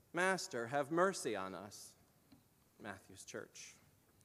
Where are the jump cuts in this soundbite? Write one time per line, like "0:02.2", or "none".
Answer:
0:02.8